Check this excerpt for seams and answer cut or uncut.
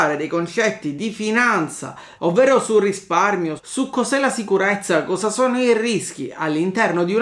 cut